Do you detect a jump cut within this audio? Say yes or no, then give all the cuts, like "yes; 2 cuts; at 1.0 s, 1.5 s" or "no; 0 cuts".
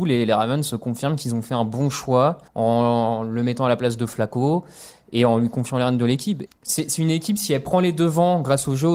yes; 2 cuts; at 2.5 s, 6.5 s